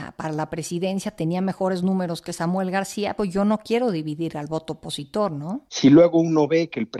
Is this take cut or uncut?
cut